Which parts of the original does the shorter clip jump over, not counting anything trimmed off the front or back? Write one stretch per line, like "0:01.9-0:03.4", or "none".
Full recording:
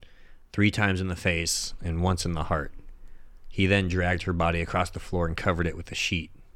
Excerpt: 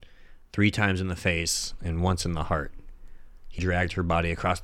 0:03.6-0:03.9

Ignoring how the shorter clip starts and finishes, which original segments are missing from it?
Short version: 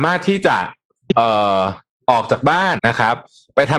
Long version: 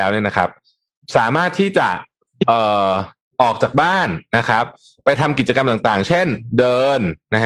0:04.1-0:04.3

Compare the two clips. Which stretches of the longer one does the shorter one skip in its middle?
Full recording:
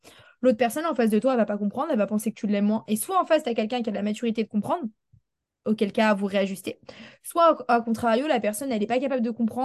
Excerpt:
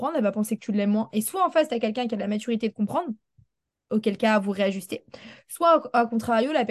none

